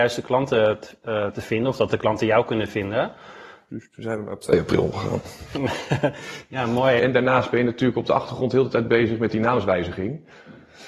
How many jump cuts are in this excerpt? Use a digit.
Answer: 2